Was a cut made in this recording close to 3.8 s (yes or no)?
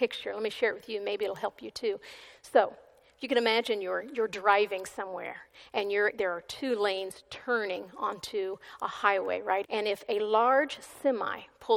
no